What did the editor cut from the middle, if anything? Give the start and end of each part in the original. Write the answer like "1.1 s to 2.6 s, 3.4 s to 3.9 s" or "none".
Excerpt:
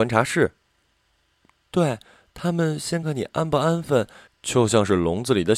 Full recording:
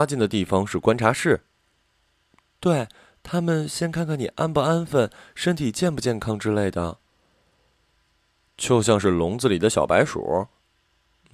3.9 s to 4.1 s, 5.3 s to 8.4 s